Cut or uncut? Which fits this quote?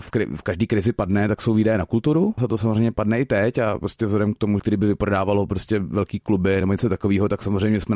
cut